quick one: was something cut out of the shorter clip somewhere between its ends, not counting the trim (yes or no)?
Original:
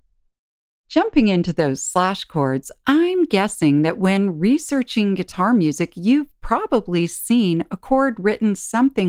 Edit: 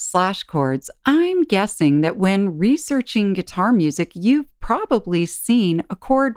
no